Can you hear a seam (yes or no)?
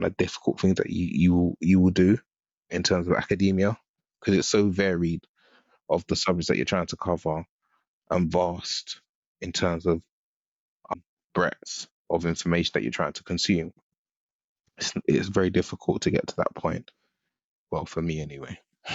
no